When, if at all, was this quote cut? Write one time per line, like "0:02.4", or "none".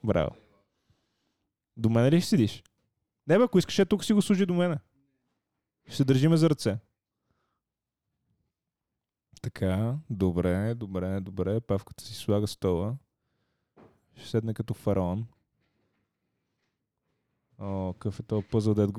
none